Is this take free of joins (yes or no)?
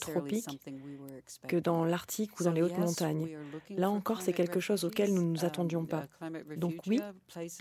yes